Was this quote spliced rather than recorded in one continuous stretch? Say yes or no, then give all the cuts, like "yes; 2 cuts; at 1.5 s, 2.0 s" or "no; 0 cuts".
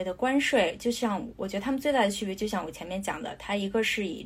yes; 1 cut; at 1.3 s